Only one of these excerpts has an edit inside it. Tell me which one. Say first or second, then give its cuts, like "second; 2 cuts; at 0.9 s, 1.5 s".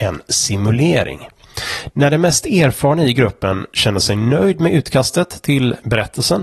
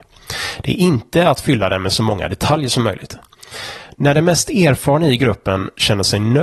first; 1 cut; at 1.9 s